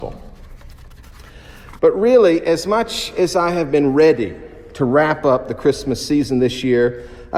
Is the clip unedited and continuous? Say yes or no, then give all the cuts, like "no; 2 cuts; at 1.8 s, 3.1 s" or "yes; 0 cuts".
no; 1 cut; at 1.8 s